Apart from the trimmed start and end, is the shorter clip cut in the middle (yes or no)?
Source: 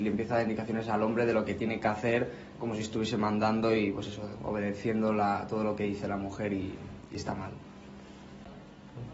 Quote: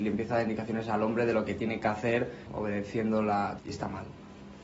yes